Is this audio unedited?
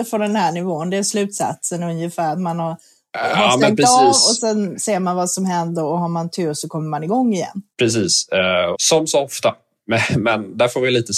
no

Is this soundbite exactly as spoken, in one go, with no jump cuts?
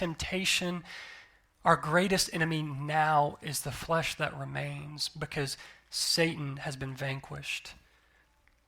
yes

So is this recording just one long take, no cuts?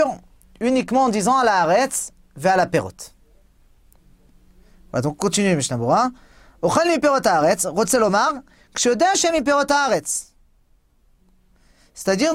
yes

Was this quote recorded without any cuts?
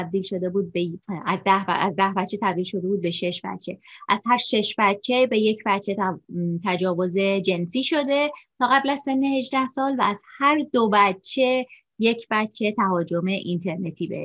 no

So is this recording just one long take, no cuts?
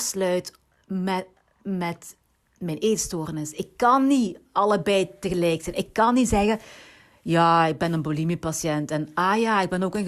yes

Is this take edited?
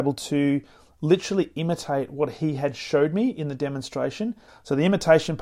yes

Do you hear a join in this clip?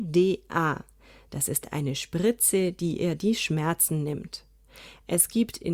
no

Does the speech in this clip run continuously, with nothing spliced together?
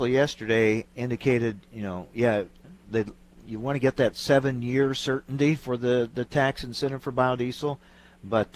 yes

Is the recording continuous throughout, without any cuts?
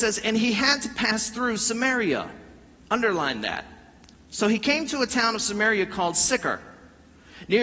yes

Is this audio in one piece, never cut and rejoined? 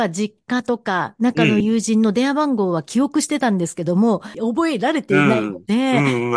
no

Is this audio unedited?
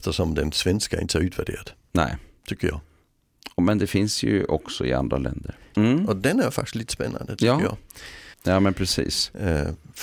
no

